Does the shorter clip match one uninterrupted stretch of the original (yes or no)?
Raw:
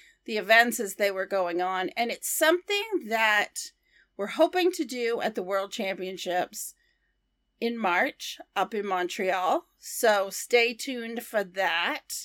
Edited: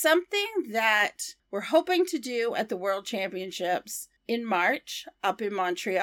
no